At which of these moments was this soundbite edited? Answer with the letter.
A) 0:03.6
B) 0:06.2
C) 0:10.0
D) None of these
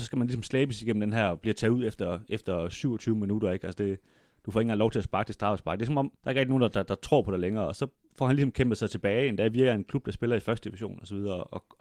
B